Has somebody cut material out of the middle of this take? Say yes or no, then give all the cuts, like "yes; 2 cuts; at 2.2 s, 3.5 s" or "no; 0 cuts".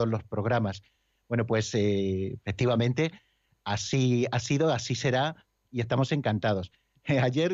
no; 0 cuts